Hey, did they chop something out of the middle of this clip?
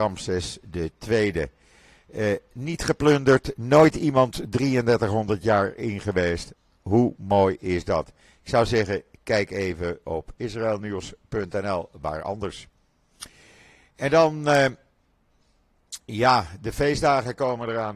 no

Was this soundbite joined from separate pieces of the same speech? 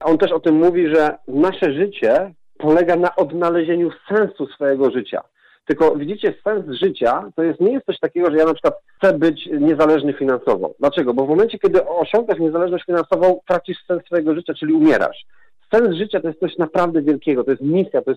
no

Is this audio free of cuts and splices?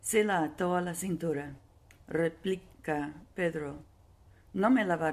no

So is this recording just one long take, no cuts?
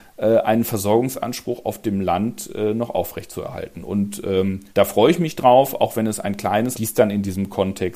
no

